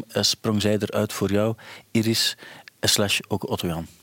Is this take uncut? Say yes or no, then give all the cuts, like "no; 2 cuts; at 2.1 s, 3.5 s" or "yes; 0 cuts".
yes; 0 cuts